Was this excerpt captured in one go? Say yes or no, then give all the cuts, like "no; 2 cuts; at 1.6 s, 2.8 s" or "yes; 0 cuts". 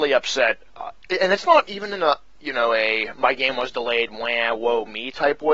no; 1 cut; at 2.4 s